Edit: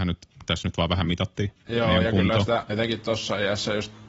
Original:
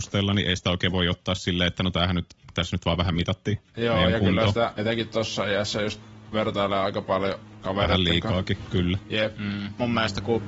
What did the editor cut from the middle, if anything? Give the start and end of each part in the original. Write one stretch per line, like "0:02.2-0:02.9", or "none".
none